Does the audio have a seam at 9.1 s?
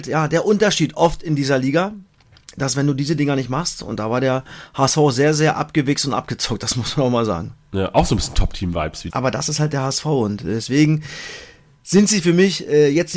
yes; 1 cut; at 9.1 s

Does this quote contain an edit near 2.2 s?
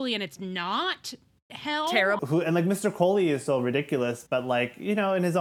yes; 1 cut; at 2.2 s

